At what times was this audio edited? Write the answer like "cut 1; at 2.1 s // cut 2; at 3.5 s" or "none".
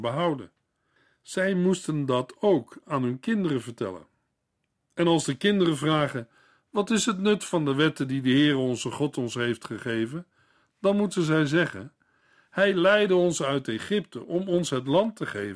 none